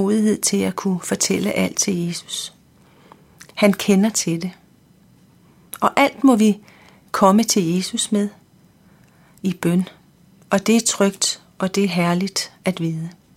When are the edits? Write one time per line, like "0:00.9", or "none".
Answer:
none